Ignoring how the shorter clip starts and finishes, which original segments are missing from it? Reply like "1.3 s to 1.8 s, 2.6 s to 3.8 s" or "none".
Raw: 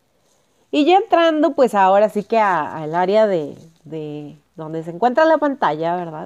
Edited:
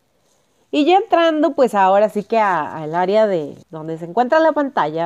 3.6 s to 4.5 s